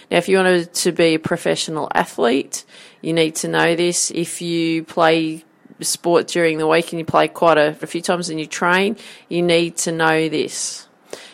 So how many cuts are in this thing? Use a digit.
2